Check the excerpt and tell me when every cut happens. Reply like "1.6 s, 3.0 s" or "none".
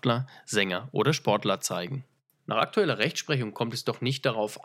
none

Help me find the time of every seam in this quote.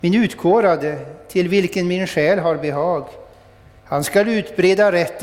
3.8 s

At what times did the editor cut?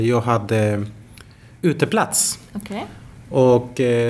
none

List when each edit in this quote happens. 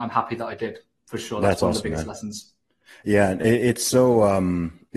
none

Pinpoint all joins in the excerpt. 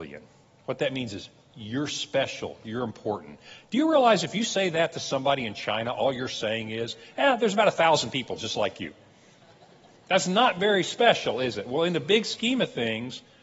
none

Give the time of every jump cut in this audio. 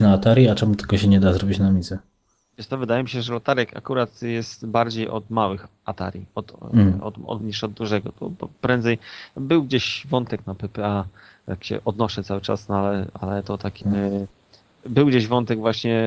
7.4 s, 13.8 s

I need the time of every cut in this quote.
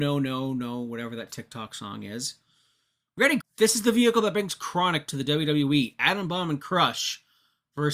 3.4 s

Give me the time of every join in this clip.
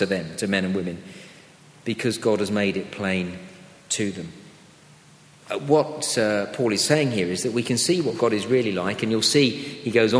none

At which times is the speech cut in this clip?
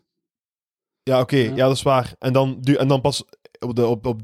none

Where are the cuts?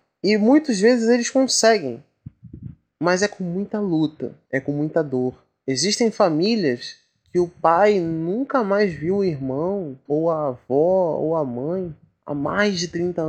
4.5 s, 10.1 s

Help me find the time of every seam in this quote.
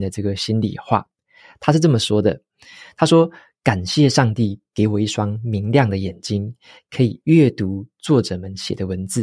none

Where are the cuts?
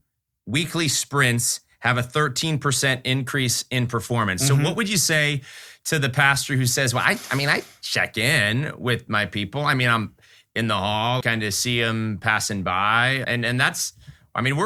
11.2 s, 13.2 s

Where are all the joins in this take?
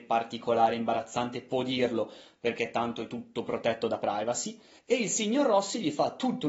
4.8 s

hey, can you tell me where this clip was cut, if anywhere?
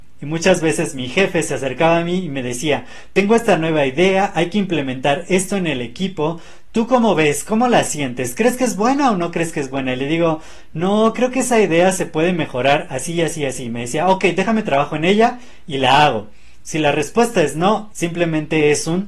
16.6 s, 17.9 s

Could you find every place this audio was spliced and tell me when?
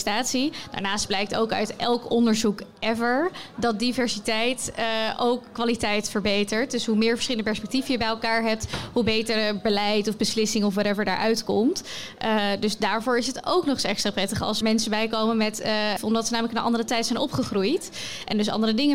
14.6 s, 16.0 s

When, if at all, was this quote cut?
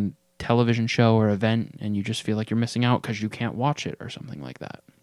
none

